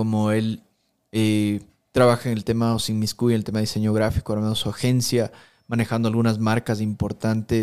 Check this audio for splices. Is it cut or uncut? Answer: uncut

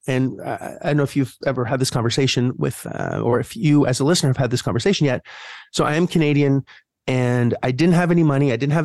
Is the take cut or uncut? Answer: cut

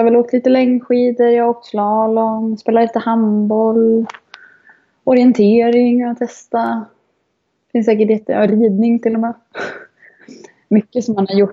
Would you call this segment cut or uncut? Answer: uncut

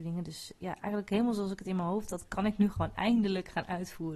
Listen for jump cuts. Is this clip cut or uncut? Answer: uncut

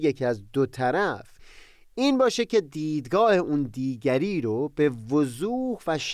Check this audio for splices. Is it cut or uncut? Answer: uncut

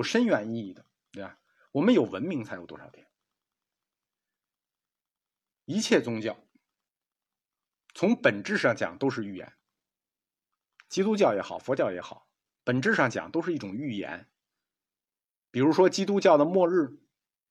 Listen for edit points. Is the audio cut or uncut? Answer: uncut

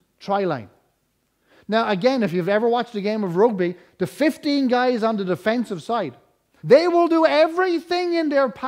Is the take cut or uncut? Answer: cut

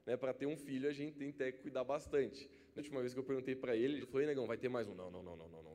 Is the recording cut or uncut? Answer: cut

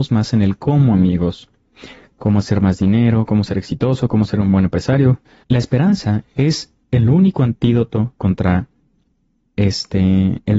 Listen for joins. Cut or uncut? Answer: cut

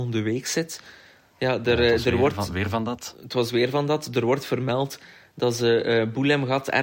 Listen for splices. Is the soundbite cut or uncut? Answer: uncut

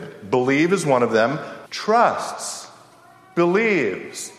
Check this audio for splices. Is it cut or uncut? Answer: cut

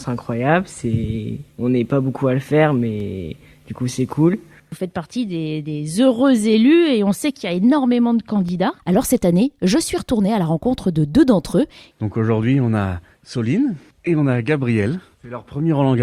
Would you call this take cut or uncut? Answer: cut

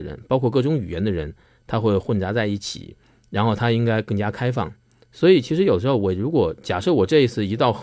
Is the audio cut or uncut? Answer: uncut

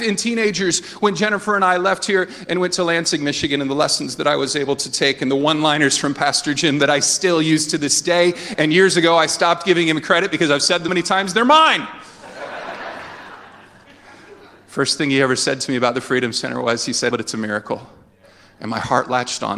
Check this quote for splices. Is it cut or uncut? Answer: cut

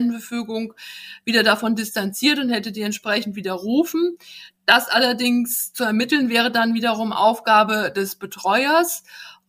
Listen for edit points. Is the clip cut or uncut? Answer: uncut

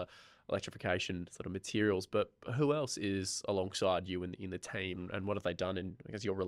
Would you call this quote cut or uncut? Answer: cut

